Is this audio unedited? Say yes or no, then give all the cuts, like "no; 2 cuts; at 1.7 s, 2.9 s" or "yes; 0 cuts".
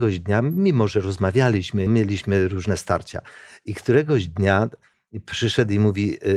no; 1 cut; at 1.9 s